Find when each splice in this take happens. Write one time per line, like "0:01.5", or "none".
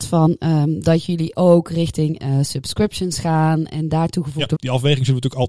0:04.6